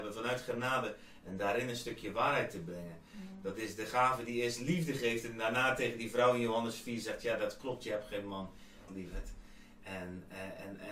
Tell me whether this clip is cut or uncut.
cut